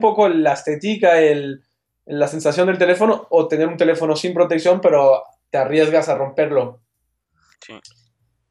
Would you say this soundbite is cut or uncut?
cut